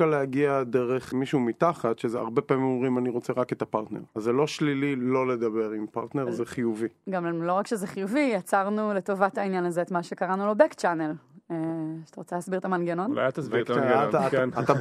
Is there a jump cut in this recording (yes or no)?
yes